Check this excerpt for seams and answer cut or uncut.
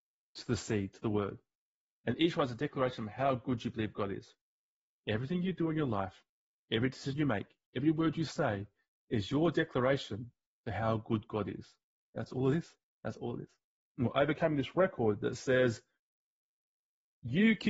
uncut